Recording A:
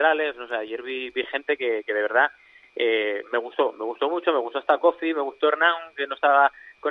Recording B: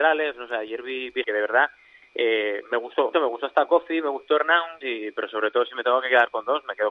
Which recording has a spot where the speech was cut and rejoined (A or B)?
B